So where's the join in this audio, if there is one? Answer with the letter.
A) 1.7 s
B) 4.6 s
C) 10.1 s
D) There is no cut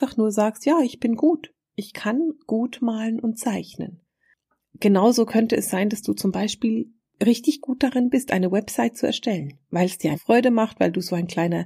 C